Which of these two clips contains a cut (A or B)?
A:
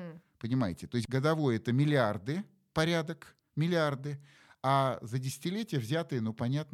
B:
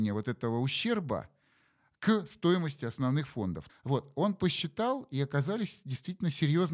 B